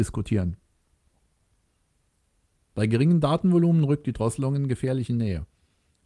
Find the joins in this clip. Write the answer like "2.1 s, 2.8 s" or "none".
2.7 s